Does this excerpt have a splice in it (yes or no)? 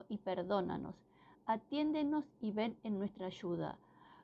no